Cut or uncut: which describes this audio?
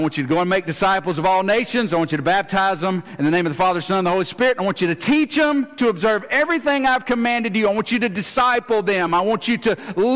uncut